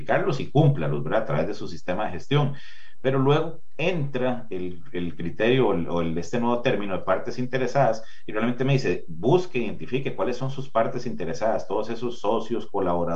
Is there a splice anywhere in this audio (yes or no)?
no